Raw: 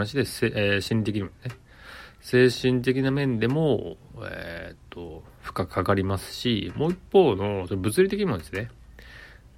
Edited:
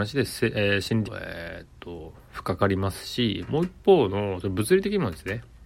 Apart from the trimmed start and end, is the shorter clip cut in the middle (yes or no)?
yes